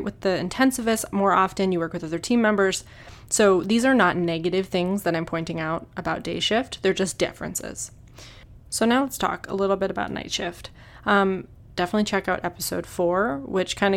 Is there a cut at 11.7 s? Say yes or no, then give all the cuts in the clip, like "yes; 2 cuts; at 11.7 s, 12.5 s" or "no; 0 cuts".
yes; 1 cut; at 11.7 s